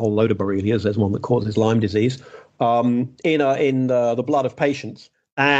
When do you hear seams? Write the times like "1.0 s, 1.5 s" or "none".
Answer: none